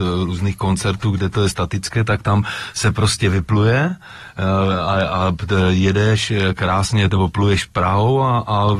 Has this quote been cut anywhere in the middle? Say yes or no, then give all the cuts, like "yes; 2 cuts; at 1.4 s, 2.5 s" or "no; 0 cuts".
no; 0 cuts